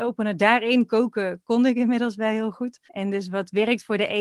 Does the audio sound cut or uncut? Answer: cut